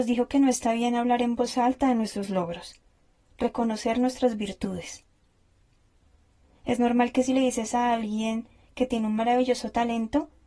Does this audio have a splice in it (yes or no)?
yes